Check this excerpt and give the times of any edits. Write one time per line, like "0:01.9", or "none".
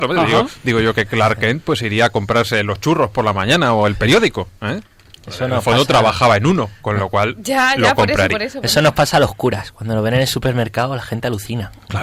none